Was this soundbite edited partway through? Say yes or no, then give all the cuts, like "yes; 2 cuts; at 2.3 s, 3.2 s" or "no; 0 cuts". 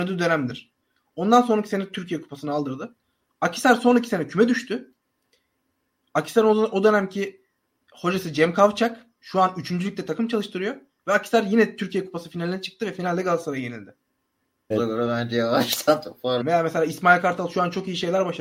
yes; 2 cuts; at 14.7 s, 16.4 s